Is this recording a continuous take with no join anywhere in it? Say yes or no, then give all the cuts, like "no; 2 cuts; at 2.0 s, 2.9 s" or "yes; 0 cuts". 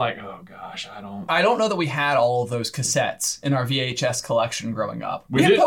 yes; 0 cuts